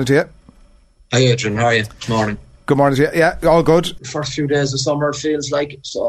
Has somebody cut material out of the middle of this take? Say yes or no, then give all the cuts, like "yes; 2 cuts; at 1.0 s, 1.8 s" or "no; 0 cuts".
yes; 1 cut; at 4.0 s